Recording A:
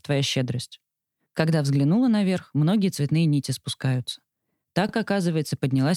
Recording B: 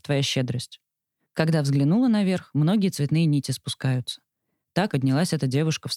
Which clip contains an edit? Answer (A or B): B